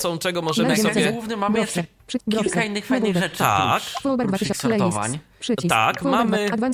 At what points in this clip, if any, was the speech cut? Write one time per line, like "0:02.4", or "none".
none